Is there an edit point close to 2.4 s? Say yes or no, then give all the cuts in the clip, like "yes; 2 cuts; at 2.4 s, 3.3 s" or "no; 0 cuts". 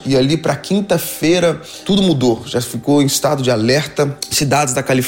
no; 0 cuts